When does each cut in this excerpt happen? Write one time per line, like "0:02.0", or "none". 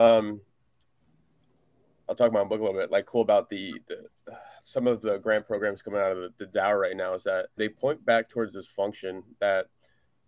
0:07.6